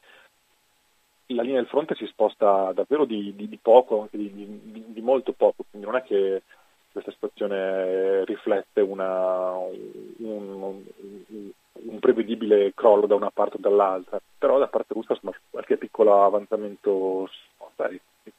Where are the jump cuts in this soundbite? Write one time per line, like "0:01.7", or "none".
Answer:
0:15.3